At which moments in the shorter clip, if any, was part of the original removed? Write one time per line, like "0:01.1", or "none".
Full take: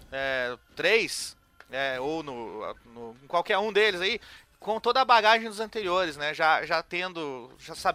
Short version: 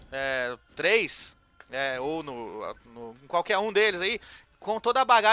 none